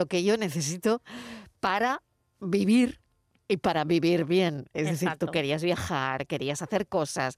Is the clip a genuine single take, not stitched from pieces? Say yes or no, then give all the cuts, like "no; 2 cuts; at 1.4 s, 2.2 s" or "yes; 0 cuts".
yes; 0 cuts